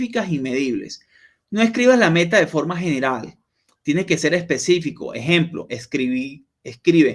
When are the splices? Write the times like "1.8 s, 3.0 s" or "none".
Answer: none